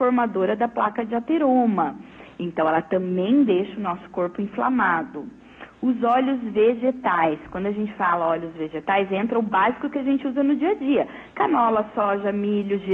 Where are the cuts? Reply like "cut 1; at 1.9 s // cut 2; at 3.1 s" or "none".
none